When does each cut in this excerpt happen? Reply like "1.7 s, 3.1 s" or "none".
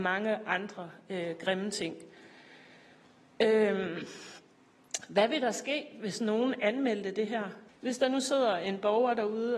7.7 s